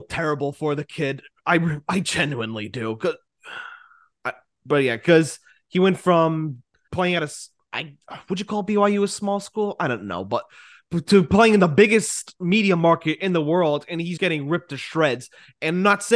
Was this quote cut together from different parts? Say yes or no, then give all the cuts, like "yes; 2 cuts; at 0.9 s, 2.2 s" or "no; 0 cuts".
yes; 2 cuts; at 6.9 s, 14.2 s